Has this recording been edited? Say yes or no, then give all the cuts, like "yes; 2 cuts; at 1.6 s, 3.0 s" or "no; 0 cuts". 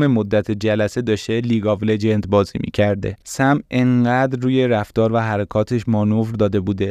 no; 0 cuts